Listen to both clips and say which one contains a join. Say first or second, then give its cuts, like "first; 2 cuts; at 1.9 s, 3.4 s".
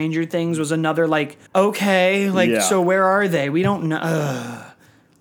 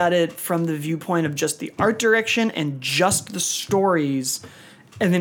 first; 1 cut; at 1.5 s